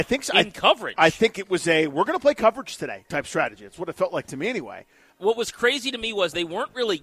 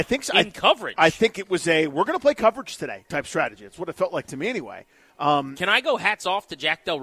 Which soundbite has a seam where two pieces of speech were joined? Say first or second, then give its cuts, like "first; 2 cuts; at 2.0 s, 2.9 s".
first; 1 cut; at 5.1 s